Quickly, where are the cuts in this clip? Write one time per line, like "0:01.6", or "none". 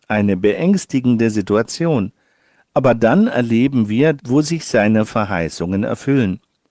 0:04.2